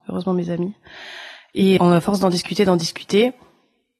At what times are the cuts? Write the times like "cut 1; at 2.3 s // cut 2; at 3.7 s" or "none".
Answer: cut 1; at 1.8 s